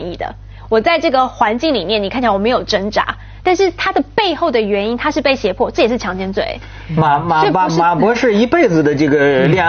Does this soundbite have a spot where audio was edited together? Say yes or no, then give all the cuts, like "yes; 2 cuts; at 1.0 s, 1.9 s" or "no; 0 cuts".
no; 0 cuts